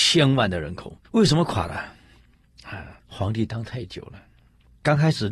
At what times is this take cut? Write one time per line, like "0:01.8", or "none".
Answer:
0:01.0
0:03.0